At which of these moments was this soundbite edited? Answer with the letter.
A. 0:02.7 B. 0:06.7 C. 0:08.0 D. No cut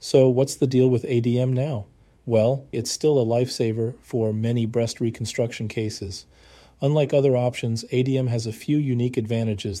A